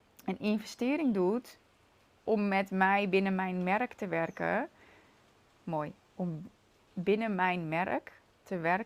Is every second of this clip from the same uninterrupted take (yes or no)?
yes